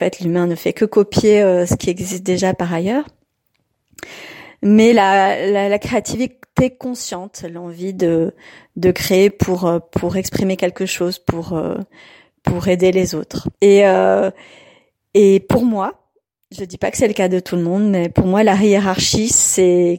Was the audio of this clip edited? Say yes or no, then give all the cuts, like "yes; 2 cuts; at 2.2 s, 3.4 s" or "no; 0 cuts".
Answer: yes; 1 cut; at 13.5 s